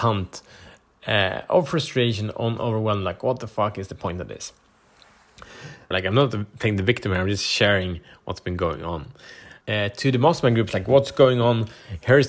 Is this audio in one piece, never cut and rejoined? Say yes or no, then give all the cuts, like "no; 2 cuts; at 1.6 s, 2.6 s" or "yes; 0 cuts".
no; 2 cuts; at 5.9 s, 9.6 s